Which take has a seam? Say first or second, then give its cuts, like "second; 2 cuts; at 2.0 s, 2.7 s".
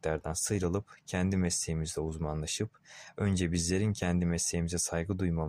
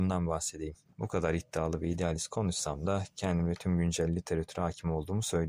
second; 1 cut; at 0.9 s